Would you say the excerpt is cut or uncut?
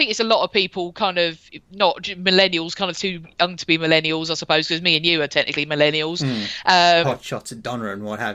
cut